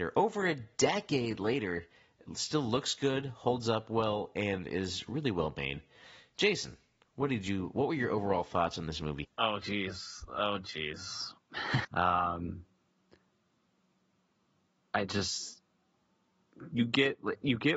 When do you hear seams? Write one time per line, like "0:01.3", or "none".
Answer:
0:09.2
0:11.8